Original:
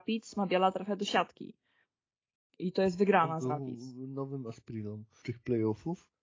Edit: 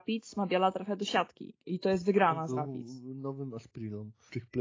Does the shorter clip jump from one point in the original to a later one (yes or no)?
yes